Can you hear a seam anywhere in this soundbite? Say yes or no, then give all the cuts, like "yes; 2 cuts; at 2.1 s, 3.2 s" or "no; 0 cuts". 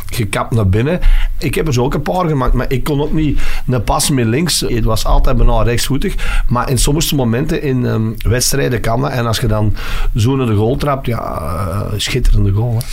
yes; 2 cuts; at 1.4 s, 4.7 s